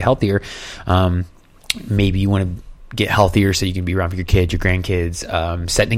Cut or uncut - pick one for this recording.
uncut